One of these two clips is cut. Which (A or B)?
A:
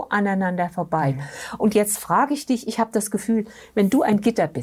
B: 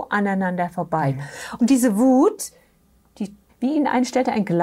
B